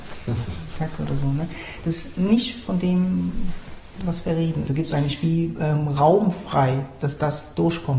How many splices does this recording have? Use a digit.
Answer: 1